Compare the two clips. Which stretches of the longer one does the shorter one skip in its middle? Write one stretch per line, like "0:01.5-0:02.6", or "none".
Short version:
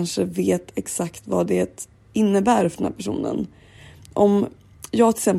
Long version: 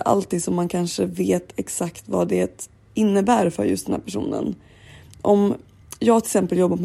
0:03.6-0:03.8